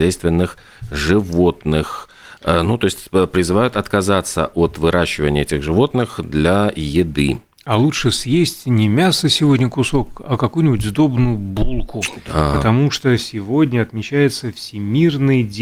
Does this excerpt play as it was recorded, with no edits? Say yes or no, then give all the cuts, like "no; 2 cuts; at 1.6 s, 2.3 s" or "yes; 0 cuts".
yes; 0 cuts